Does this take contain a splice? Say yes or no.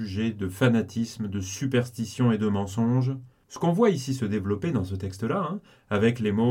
yes